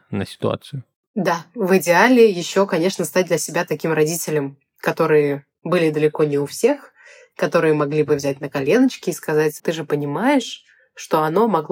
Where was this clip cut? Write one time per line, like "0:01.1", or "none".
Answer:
0:09.6

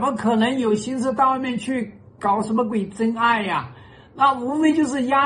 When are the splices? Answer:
none

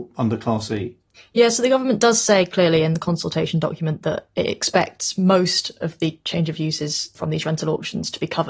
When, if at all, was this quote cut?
none

